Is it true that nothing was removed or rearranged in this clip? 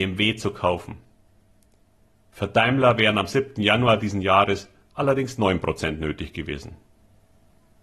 yes; 0 cuts

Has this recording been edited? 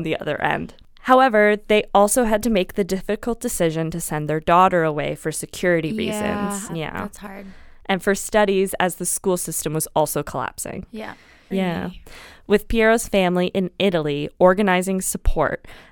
yes; 2 cuts; at 6.7 s, 11.5 s

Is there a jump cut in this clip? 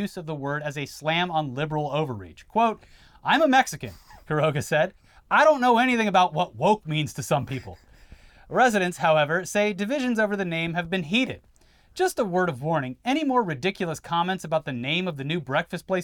no; 0 cuts

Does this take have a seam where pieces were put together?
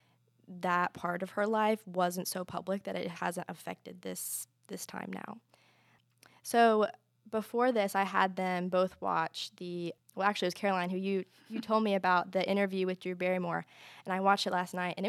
no; 0 cuts

